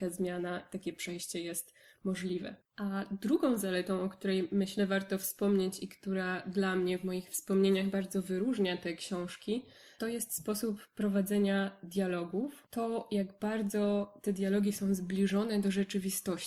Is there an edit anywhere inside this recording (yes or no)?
no